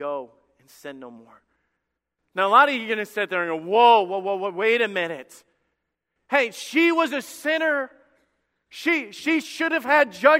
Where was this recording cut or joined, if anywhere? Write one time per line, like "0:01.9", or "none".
none